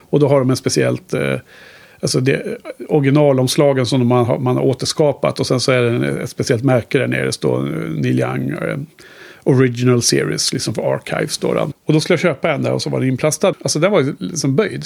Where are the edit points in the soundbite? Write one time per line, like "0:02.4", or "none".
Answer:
0:11.7
0:13.5